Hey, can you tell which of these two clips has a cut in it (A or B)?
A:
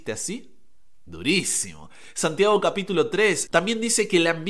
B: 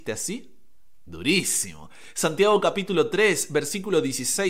A